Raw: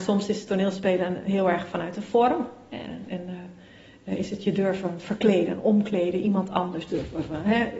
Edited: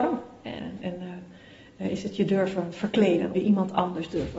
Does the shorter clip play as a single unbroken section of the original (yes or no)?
no